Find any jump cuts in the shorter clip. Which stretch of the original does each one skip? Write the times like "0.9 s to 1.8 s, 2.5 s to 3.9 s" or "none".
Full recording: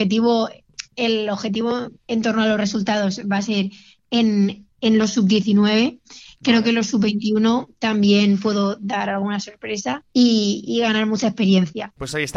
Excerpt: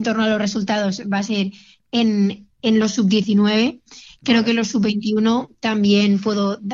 none